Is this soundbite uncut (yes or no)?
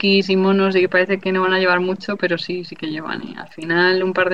yes